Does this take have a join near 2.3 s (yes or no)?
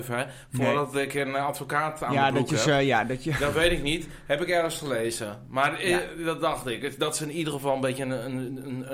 no